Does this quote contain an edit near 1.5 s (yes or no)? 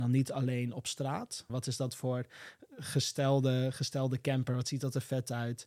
yes